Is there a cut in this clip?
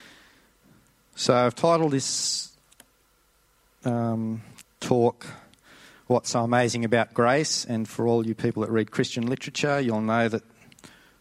no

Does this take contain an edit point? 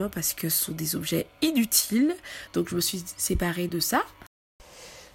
yes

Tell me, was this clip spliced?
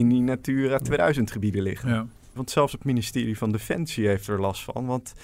yes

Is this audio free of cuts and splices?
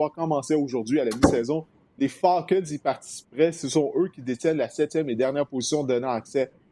yes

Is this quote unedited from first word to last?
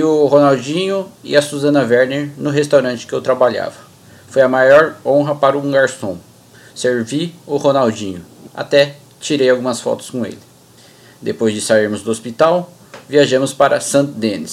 no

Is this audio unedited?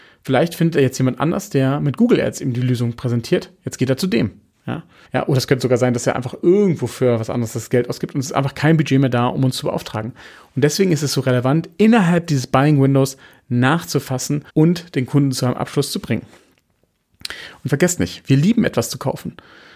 no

